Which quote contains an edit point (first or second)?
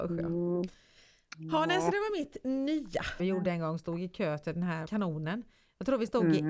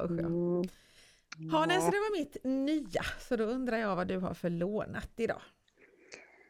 first